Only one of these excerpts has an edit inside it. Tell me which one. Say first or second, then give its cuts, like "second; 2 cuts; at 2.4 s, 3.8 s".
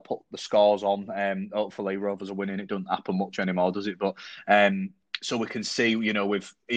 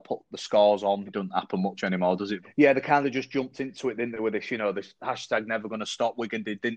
second; 2 cuts; at 1.1 s, 2.4 s